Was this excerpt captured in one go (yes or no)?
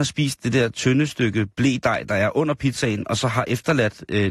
yes